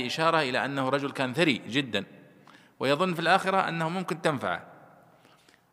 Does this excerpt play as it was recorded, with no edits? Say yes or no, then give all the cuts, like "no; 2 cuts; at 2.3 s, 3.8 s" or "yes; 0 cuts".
yes; 0 cuts